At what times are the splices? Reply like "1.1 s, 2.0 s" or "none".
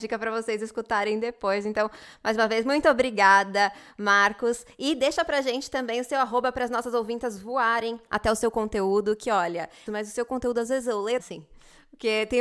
9.9 s, 11.2 s